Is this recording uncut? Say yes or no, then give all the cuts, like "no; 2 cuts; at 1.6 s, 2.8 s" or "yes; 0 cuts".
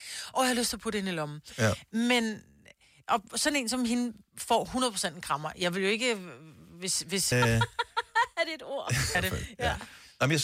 no; 2 cuts; at 7.3 s, 9.1 s